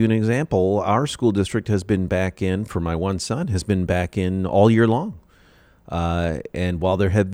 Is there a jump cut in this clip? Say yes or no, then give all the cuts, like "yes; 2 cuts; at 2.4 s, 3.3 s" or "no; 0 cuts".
no; 0 cuts